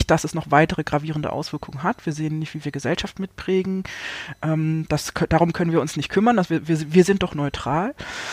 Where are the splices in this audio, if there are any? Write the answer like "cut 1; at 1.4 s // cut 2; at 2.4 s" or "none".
none